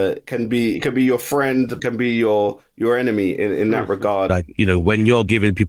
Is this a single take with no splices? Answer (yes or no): no